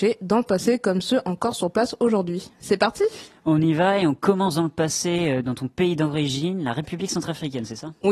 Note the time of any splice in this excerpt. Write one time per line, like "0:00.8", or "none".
none